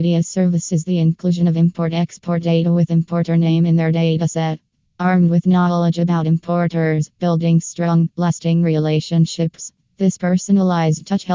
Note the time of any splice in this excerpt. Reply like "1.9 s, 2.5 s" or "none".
4.9 s, 7.1 s